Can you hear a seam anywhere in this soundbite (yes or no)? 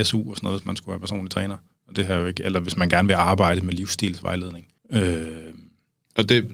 yes